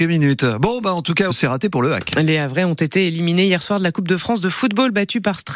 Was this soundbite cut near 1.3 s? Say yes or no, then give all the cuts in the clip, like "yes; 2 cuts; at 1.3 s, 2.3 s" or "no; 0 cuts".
yes; 1 cut; at 1.3 s